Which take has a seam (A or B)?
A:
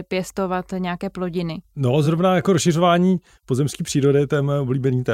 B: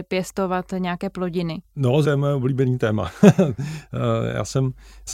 B